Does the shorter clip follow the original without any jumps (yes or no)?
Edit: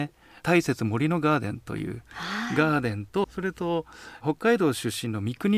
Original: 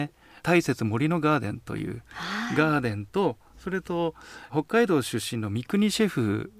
no